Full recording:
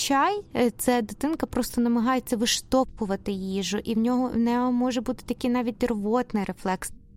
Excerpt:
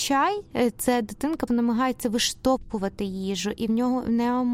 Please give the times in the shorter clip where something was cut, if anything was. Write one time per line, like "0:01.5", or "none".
0:01.5